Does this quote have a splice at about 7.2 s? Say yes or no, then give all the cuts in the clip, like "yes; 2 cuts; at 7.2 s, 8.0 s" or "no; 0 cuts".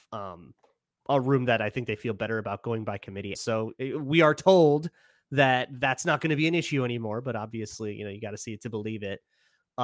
no; 1 cut; at 3.3 s